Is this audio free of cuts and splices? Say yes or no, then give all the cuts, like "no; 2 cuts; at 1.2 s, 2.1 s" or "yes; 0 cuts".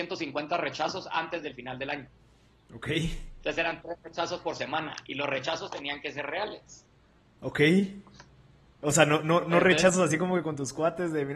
yes; 0 cuts